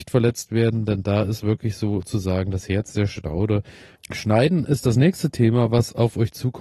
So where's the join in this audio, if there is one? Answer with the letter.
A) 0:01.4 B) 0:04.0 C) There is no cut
B